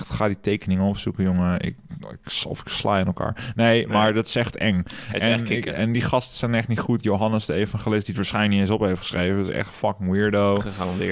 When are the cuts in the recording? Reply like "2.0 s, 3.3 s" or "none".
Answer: none